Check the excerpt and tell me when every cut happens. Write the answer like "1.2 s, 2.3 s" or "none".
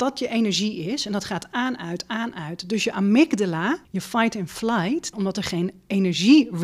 3.8 s, 5.1 s